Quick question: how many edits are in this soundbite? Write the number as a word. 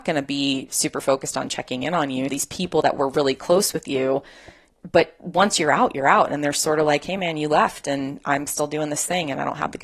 one